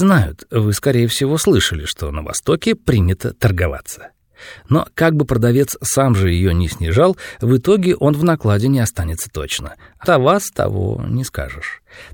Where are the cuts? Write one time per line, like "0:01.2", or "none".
0:10.0